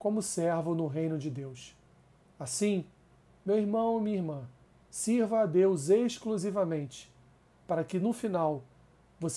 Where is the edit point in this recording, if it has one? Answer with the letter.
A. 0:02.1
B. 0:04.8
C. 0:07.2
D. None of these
D